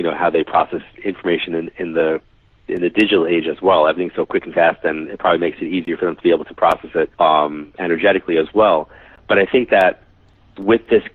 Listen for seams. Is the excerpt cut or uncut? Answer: cut